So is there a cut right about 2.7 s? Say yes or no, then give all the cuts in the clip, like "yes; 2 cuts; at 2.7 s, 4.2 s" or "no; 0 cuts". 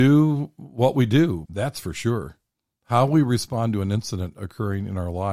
no; 1 cut; at 1.4 s